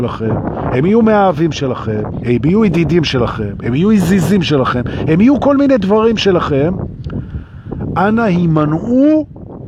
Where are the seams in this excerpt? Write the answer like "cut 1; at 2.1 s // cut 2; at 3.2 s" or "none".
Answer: none